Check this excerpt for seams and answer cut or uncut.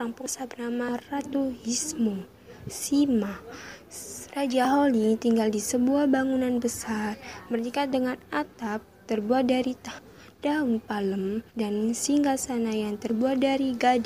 cut